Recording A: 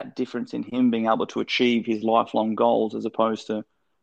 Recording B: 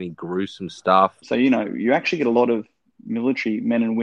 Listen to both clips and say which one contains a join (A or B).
B